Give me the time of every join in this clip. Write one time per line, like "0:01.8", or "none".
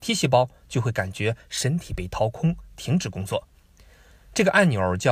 none